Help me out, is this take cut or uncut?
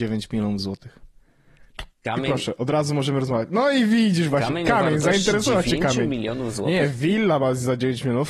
uncut